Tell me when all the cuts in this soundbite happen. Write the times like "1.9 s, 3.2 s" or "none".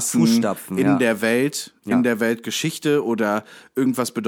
none